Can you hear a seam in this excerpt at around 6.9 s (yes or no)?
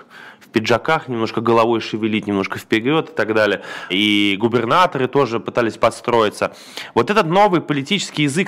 no